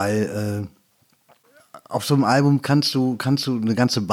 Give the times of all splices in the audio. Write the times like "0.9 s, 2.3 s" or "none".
none